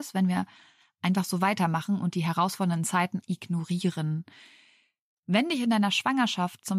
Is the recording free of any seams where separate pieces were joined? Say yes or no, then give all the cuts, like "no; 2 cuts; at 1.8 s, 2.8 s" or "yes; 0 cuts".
no; 1 cut; at 3.2 s